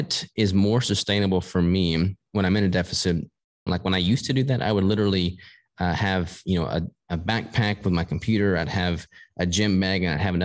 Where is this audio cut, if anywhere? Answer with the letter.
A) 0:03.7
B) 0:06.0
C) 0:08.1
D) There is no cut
A